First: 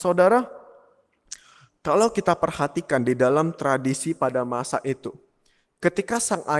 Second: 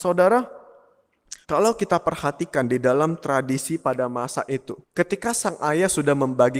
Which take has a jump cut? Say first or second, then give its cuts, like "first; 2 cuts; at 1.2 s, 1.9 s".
second; 2 cuts; at 1.4 s, 4.8 s